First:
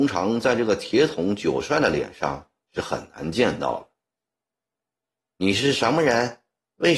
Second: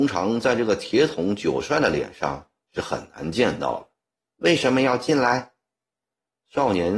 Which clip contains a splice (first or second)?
second